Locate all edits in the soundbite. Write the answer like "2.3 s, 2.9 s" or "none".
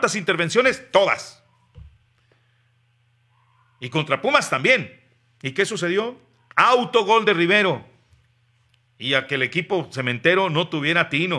5.4 s, 8.8 s